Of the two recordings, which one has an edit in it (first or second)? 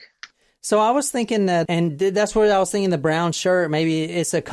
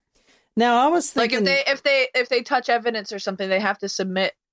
first